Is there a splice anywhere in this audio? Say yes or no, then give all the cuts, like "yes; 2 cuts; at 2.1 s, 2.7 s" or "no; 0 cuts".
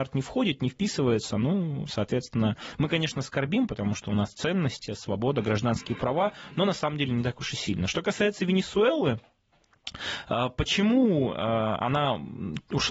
yes; 1 cut; at 4.9 s